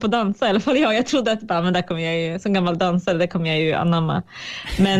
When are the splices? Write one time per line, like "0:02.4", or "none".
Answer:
none